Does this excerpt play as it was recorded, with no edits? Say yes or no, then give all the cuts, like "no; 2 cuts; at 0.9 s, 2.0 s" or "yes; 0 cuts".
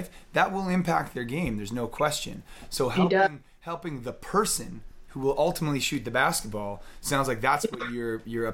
yes; 0 cuts